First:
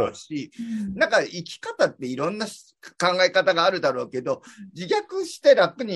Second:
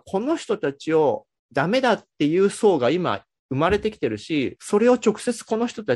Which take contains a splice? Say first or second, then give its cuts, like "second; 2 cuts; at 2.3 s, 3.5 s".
second; 1 cut; at 4.6 s